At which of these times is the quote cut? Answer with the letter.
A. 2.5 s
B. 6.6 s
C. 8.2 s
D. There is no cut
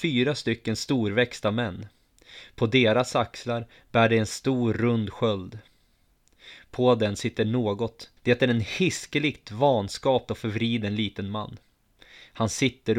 C